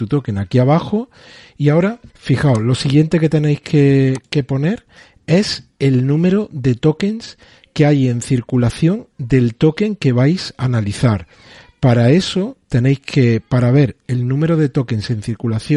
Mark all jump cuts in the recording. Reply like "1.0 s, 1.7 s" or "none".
2.1 s